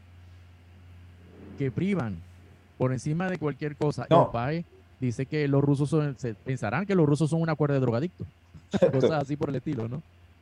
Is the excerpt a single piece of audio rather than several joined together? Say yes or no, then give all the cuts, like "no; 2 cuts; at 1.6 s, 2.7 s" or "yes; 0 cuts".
no; 2 cuts; at 4.1 s, 8.9 s